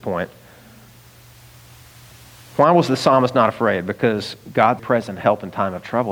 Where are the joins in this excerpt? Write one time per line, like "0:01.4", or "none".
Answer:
0:04.8